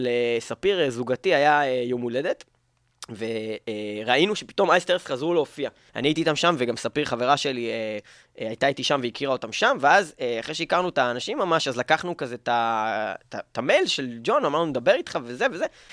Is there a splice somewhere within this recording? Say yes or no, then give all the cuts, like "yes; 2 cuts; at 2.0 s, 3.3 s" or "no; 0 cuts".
yes; 1 cut; at 5.9 s